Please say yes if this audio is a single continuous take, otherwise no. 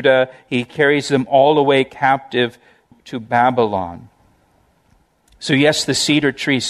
yes